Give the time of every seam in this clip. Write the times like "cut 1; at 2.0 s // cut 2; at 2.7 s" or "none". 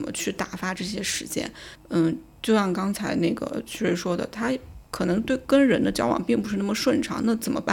cut 1; at 1.8 s